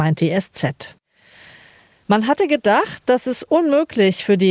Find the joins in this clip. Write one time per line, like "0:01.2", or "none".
none

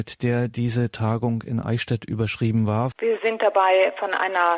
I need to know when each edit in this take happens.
0:02.9

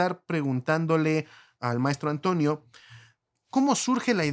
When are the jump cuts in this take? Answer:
none

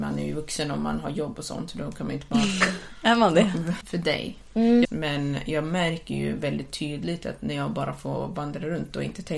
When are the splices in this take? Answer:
0:03.8
0:04.8

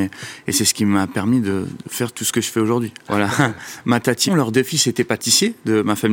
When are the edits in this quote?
0:03.0
0:04.3

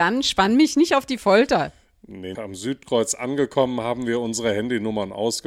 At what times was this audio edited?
0:02.3

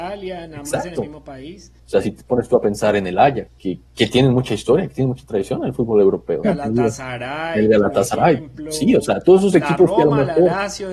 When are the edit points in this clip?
0:01.8
0:03.5
0:06.4

